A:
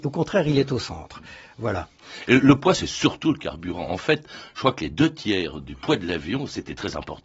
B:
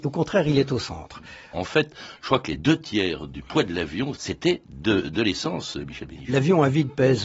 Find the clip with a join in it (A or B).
B